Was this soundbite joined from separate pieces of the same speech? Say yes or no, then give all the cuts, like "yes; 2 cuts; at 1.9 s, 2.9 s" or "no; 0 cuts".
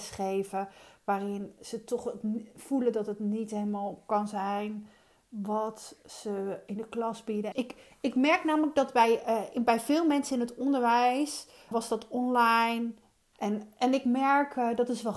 yes; 3 cuts; at 7.5 s, 11.7 s, 13.3 s